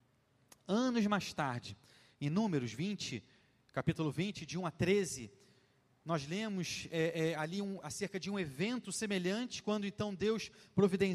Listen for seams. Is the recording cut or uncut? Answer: uncut